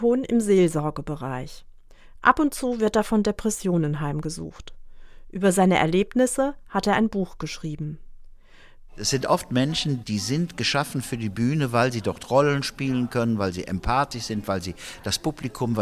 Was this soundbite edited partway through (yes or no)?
yes